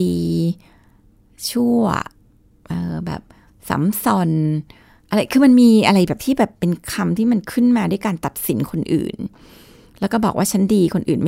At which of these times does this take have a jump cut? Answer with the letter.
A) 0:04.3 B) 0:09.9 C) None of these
C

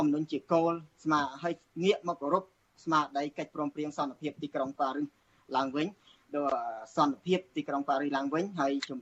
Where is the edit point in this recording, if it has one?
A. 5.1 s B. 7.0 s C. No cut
C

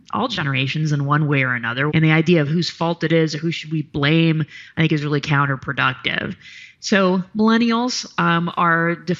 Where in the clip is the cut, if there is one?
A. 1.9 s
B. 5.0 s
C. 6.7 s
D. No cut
A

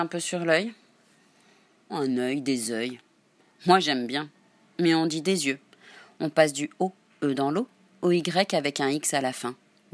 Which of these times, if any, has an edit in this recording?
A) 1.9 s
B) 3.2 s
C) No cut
A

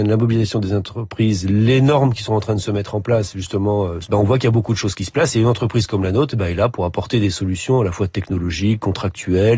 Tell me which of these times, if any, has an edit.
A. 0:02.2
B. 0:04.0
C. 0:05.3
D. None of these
B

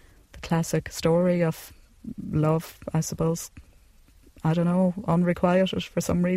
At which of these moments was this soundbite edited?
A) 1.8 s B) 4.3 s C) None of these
C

